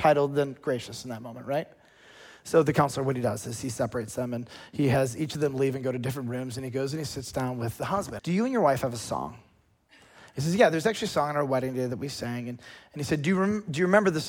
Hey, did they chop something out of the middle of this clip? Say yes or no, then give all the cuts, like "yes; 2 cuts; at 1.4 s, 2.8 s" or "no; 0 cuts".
yes; 1 cut; at 8.2 s